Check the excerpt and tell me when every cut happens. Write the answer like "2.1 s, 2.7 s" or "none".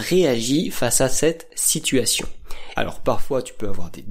2.8 s